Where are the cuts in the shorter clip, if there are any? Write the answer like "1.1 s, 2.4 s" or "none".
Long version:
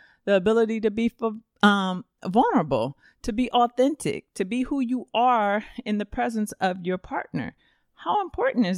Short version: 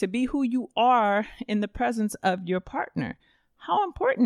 none